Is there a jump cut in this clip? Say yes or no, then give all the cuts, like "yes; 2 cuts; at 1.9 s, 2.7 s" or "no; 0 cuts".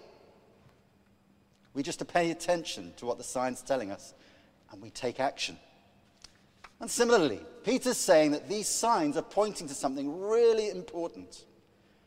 no; 0 cuts